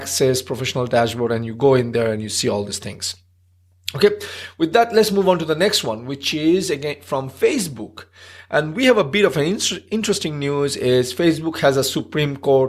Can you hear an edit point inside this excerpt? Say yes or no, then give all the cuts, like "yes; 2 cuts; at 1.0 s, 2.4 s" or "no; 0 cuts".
no; 0 cuts